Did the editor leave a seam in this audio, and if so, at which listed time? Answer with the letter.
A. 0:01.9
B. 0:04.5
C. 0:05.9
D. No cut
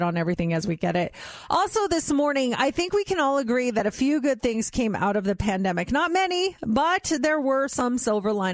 D